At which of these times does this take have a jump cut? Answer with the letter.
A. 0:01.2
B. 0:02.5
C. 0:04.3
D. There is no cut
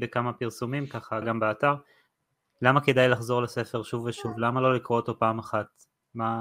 A